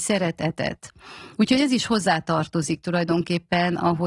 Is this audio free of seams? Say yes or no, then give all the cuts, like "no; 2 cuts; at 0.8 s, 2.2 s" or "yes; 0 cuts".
no; 1 cut; at 1.4 s